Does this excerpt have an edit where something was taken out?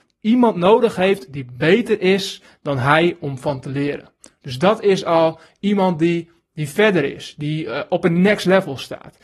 yes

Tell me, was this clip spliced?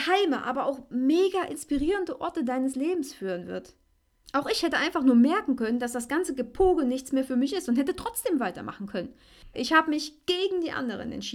yes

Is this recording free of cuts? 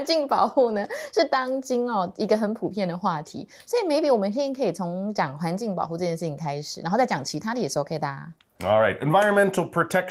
yes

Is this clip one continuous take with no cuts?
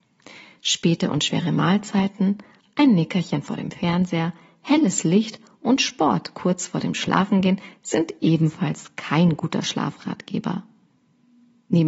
no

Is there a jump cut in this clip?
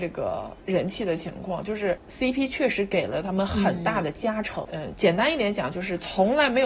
yes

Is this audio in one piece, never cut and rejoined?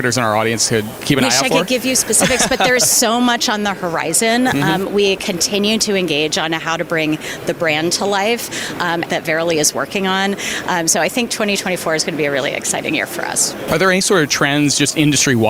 no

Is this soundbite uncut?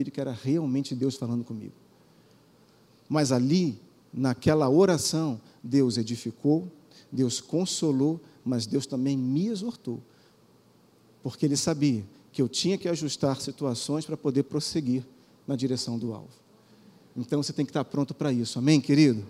yes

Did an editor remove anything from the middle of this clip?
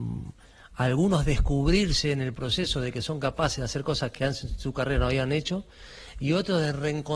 no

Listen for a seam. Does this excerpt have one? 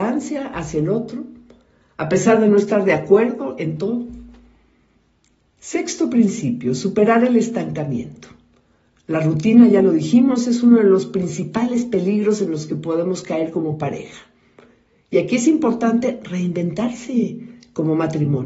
no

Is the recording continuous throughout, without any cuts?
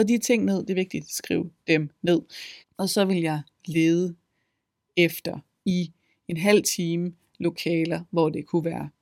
no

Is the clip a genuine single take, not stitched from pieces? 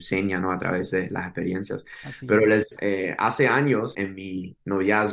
no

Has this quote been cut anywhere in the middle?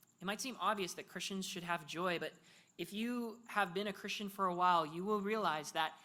no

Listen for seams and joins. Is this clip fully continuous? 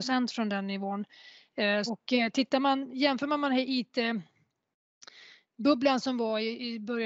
no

